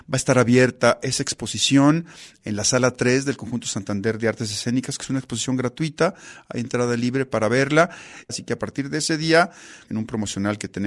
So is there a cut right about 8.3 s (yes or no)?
yes